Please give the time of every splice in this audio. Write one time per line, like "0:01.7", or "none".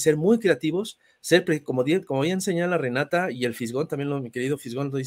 none